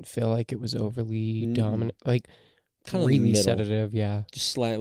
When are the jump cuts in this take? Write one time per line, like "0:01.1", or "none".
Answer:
none